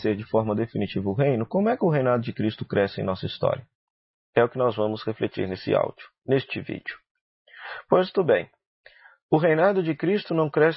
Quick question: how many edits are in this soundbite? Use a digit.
0